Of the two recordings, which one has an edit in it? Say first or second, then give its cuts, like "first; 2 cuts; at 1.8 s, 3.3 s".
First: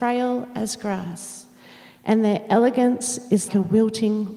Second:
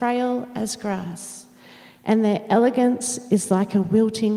first; 1 cut; at 3.5 s